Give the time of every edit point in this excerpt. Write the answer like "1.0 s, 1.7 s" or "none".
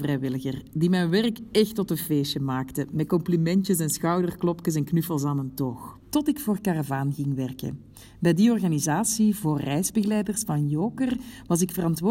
6.0 s

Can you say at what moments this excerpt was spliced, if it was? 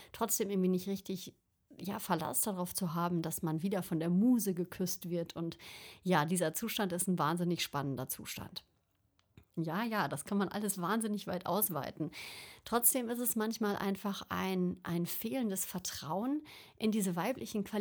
9.6 s

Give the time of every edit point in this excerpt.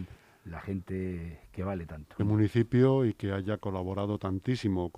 2.2 s

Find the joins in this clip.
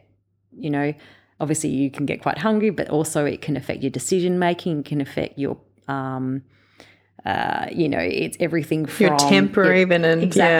none

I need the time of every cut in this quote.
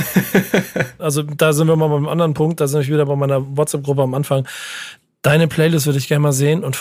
1.0 s

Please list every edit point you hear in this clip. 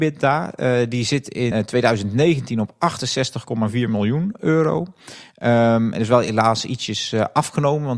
1.5 s

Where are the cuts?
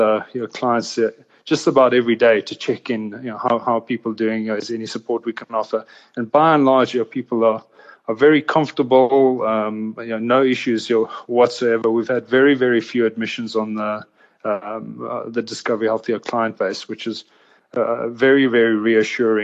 none

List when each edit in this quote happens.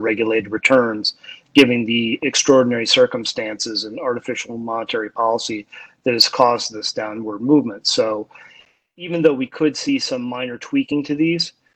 none

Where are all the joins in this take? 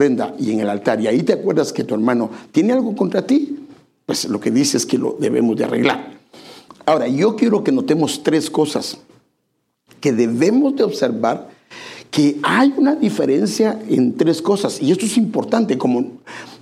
6.7 s

